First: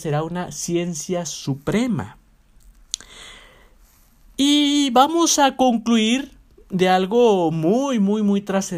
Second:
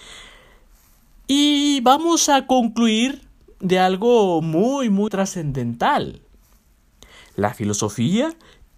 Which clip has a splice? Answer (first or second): second